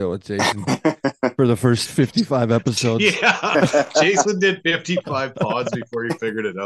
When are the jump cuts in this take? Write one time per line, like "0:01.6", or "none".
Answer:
none